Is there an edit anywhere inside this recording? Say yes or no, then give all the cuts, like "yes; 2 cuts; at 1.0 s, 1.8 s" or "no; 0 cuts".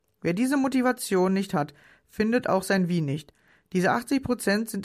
no; 0 cuts